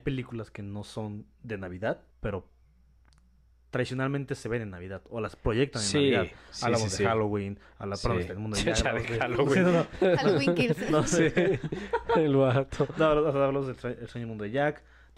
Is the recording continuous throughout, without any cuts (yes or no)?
no